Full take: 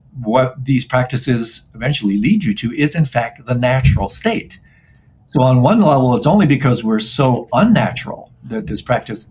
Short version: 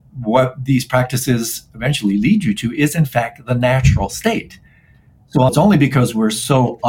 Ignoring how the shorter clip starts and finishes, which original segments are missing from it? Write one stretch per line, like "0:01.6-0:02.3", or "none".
0:05.5-0:06.2